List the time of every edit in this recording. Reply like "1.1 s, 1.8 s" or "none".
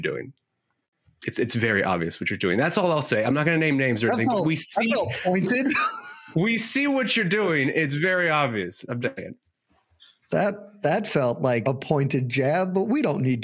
9.0 s, 11.6 s